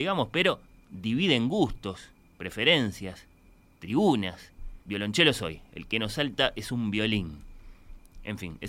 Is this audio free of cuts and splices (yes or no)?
no